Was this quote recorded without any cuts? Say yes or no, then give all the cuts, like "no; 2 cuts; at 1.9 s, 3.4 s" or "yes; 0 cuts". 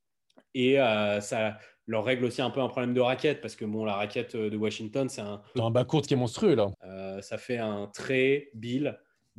no; 2 cuts; at 5.5 s, 6.7 s